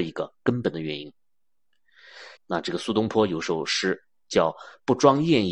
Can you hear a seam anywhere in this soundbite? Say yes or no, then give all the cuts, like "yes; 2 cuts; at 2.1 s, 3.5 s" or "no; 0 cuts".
yes; 1 cut; at 2.4 s